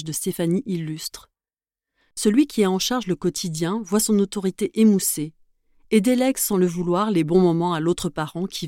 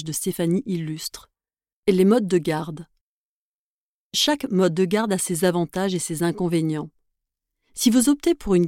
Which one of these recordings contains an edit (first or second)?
second